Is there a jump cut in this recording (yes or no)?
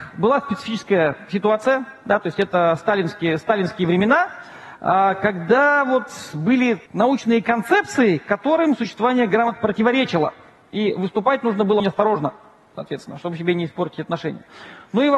yes